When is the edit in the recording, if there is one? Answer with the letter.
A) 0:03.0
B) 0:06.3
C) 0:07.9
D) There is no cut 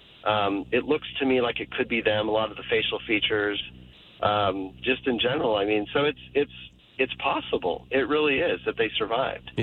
D